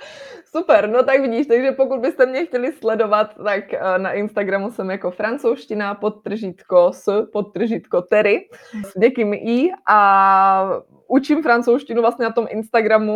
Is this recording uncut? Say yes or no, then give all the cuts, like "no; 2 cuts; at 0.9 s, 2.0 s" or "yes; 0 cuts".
no; 1 cut; at 8.8 s